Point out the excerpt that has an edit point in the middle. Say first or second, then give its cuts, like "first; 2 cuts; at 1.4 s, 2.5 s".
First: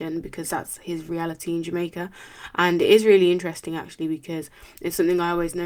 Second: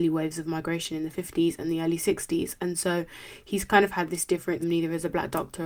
second; 1 cut; at 4.6 s